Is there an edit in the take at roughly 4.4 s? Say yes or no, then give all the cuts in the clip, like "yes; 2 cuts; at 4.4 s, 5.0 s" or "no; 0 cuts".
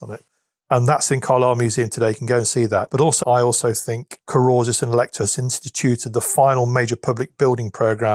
no; 1 cut; at 3.2 s